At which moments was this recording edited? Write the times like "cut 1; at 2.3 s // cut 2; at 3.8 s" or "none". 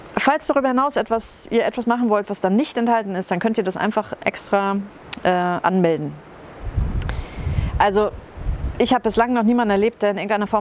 none